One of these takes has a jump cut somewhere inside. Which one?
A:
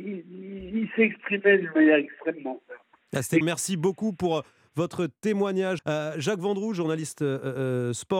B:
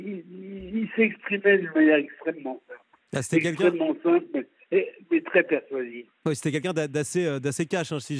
A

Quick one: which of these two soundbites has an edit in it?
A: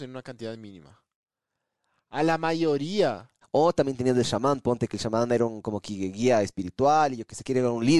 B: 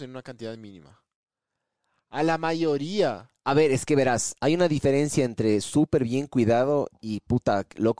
A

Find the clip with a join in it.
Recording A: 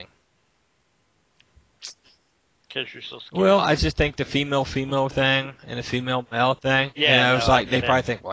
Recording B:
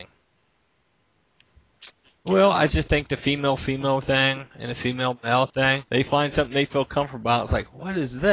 B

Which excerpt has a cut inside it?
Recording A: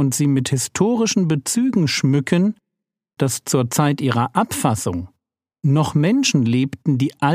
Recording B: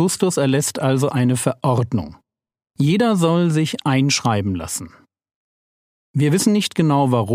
A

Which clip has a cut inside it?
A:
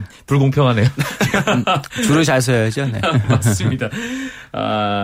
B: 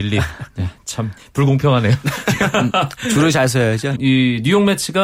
B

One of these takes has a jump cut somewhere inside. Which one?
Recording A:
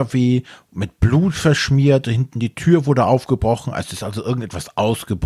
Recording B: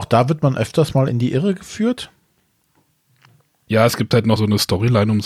B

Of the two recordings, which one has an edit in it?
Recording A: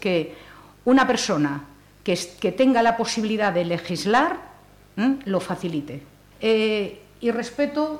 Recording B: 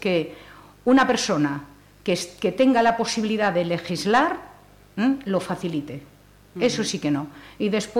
A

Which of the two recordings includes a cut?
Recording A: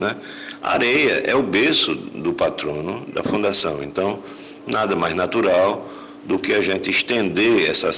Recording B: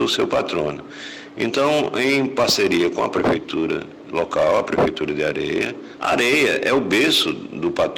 B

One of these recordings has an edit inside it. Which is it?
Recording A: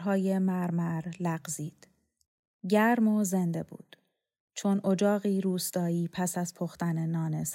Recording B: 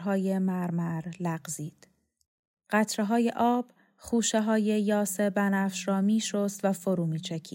B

